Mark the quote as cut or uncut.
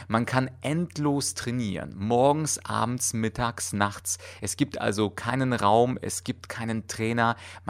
uncut